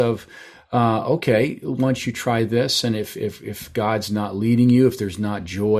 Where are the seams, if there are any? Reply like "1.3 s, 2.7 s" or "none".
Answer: none